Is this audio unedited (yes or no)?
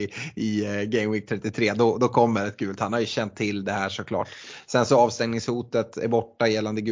yes